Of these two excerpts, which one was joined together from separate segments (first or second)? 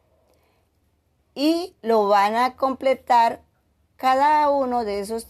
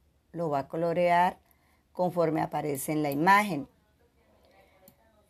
first